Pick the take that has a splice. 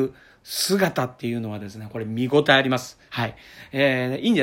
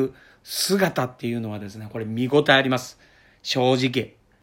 first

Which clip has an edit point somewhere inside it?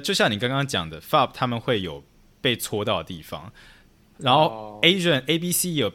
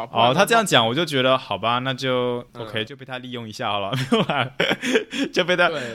second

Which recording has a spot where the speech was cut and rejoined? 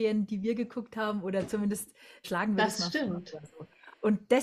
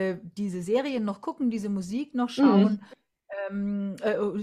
first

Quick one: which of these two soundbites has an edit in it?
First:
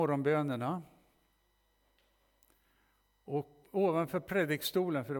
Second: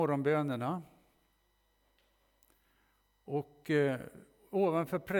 first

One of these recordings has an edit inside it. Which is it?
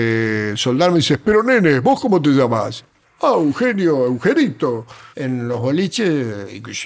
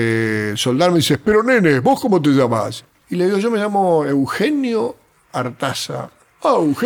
first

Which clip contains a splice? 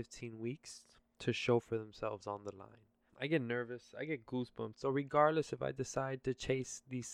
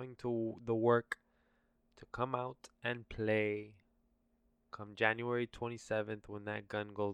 first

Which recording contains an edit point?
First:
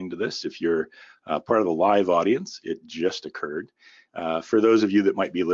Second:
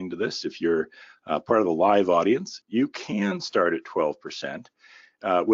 second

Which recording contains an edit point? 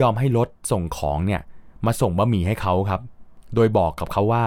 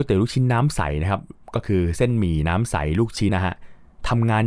second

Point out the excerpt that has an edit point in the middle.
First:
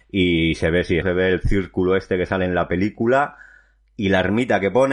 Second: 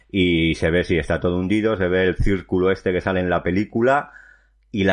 first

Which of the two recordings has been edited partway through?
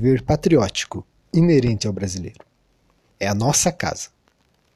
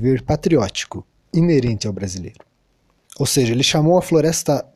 second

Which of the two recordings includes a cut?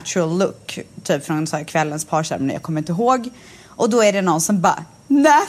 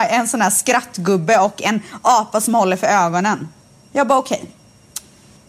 second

